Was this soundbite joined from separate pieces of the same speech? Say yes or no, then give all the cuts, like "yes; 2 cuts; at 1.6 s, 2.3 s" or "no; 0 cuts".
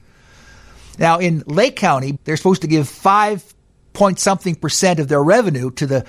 yes; 1 cut; at 2.2 s